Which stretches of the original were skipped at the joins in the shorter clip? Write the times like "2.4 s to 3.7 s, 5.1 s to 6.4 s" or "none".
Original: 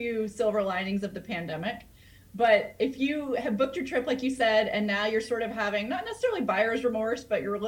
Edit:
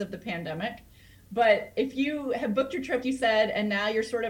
4.0 s to 4.2 s